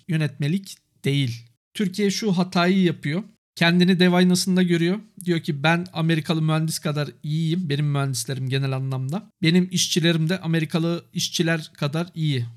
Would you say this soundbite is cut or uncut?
uncut